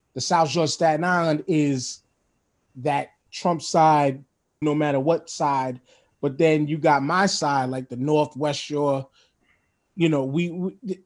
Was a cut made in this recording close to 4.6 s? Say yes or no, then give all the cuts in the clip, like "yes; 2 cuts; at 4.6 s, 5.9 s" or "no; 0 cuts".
yes; 1 cut; at 4.6 s